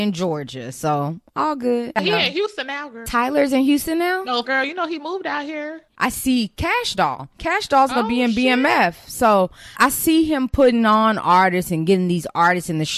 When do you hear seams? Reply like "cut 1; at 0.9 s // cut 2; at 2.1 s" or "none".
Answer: cut 1; at 4.4 s // cut 2; at 5.9 s // cut 3; at 9.7 s